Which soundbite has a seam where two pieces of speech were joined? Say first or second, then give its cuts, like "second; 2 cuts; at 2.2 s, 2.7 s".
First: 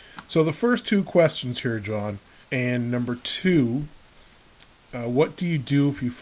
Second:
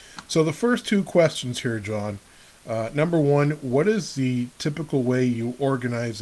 first; 1 cut; at 2.4 s